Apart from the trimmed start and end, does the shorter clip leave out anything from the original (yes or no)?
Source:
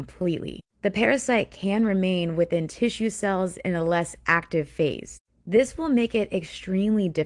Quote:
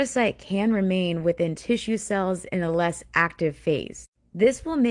no